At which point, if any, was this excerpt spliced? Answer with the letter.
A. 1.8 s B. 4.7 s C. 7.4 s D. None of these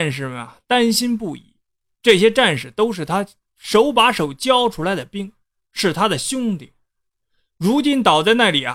D